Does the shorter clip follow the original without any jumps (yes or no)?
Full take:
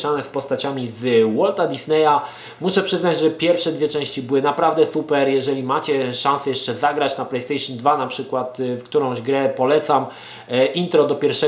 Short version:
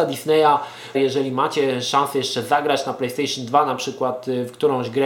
no